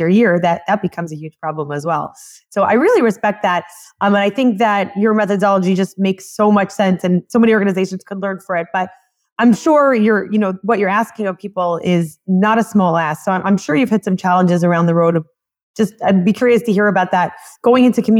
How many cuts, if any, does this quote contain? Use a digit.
0